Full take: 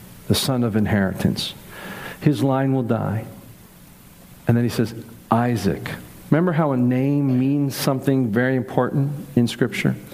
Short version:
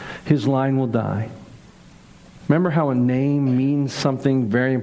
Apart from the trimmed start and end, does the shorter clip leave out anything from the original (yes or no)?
yes